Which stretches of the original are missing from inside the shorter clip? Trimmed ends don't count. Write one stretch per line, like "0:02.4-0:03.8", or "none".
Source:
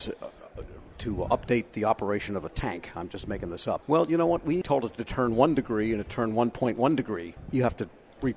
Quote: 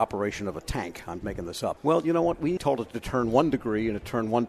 0:03.1-0:03.3